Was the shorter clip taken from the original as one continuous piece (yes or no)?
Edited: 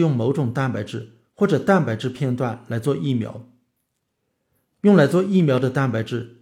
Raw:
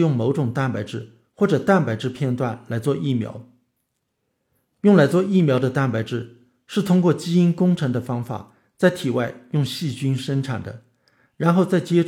yes